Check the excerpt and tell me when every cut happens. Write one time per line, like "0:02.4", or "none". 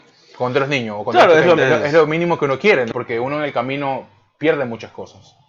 0:01.6
0:02.9